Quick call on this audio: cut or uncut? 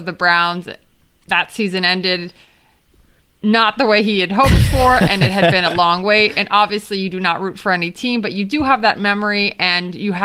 uncut